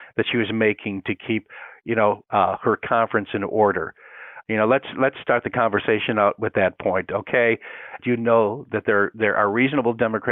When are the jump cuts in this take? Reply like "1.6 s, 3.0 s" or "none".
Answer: 4.4 s, 8.0 s